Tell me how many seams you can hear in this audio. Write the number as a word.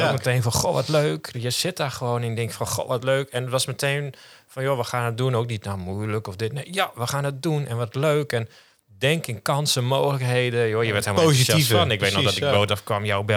one